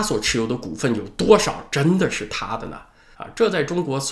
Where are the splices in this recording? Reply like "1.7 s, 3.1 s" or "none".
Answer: 3.1 s